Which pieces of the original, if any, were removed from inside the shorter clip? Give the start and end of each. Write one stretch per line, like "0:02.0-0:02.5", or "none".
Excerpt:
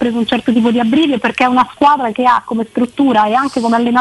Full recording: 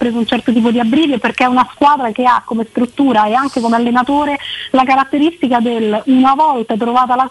none